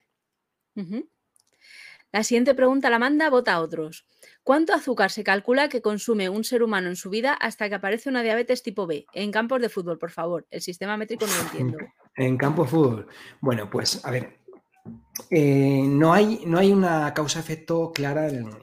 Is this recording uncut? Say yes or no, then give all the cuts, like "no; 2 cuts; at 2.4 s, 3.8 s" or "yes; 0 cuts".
yes; 0 cuts